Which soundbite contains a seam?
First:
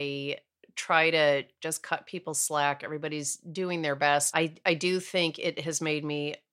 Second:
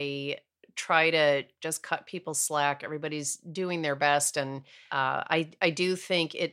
first; 1 cut; at 4.3 s

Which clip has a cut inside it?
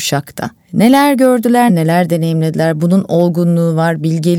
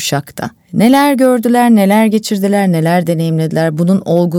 first; 1 cut; at 1.7 s

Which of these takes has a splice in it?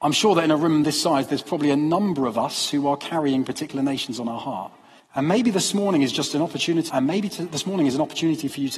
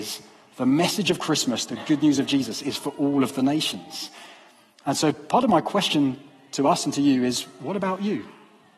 first; 2 cuts; at 5.0 s, 6.9 s

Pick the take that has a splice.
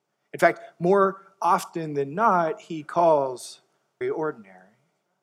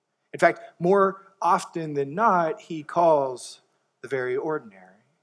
first; 1 cut; at 4.0 s

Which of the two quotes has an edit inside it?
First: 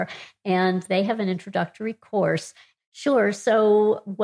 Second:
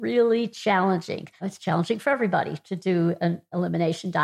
first; 1 cut; at 2.8 s

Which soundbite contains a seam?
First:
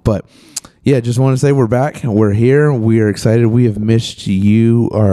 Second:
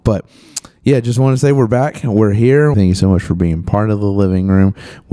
second; 1 cut; at 2.7 s

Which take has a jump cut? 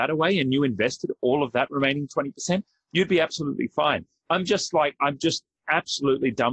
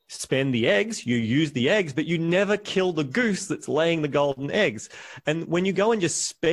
first; 1 cut; at 4.2 s

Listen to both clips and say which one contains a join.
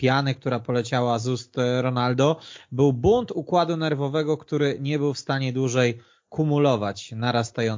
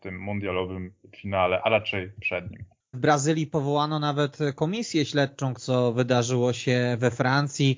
second; 2 cuts; at 2.9 s, 5.6 s

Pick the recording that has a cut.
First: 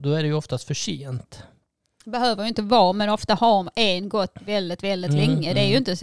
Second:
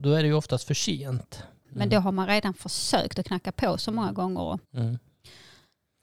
second; 2 cuts; at 1.6 s, 4.6 s

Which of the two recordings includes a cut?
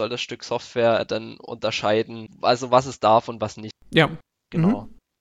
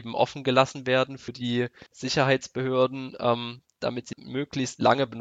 first; 1 cut; at 2.3 s

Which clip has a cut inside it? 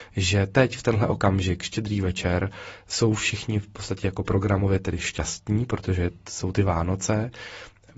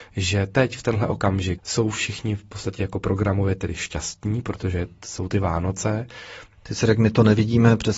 second; 2 cuts; at 1.6 s, 6.5 s

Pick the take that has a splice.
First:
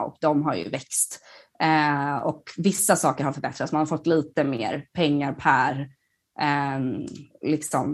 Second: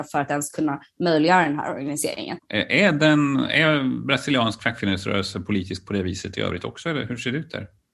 second; 1 cut; at 2.4 s

